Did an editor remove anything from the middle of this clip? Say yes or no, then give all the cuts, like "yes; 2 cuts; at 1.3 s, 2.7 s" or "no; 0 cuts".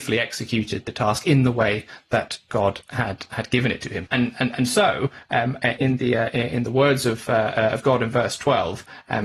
yes; 2 cuts; at 4.1 s, 5.8 s